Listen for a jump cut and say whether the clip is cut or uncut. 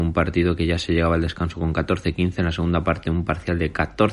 uncut